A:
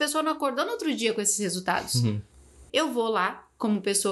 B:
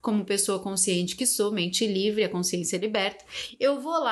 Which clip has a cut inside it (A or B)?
A